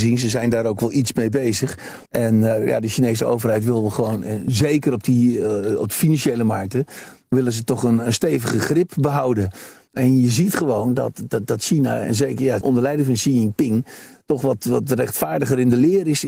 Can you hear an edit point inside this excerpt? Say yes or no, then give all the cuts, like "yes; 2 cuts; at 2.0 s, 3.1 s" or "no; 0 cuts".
yes; 2 cuts; at 2.1 s, 12.6 s